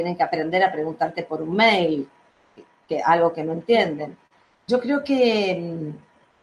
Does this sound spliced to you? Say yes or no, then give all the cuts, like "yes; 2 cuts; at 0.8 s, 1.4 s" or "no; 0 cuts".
yes; 1 cut; at 4.5 s